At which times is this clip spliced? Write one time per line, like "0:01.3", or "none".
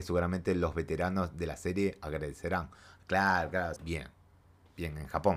0:03.8